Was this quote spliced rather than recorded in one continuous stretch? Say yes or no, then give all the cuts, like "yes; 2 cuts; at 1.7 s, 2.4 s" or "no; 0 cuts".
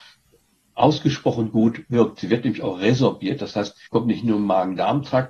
yes; 1 cut; at 3.9 s